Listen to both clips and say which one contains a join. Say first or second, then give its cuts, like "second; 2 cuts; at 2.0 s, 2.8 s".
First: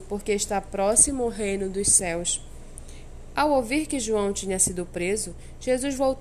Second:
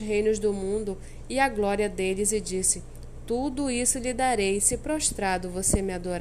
first; 1 cut; at 3.4 s